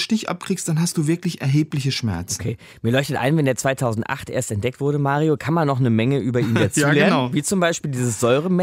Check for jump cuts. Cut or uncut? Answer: uncut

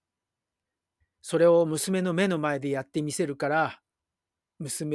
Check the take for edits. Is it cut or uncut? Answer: cut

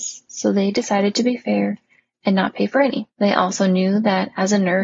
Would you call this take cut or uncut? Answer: cut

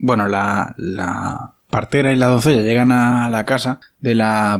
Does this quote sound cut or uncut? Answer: uncut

